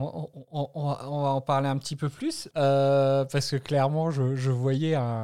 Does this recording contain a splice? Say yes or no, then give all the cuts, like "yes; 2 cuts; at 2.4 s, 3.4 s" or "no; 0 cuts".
yes; 1 cut; at 2.5 s